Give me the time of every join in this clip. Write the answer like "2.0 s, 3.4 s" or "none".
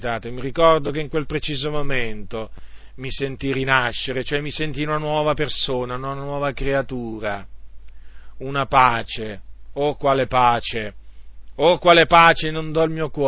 none